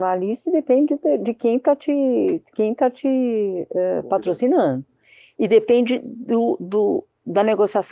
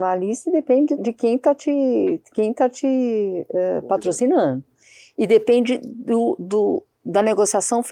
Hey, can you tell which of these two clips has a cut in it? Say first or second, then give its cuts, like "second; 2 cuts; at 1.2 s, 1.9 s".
second; 1 cut; at 1.0 s